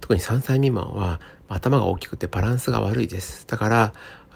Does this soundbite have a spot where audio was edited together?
no; 0 cuts

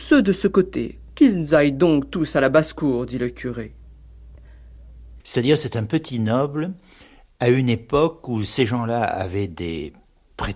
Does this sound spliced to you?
yes; 1 cut; at 5.2 s

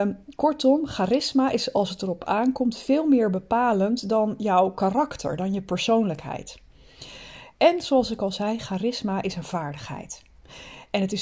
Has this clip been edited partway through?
no; 0 cuts

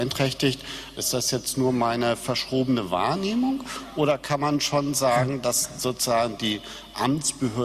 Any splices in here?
yes; 1 cut; at 1.0 s

